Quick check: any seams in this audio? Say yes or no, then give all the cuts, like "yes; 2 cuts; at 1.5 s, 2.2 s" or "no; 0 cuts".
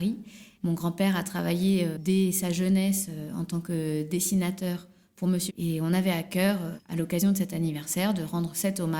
yes; 1 cut; at 5.5 s